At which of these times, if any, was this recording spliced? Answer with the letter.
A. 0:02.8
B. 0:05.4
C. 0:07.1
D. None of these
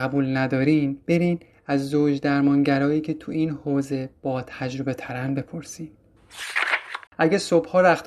C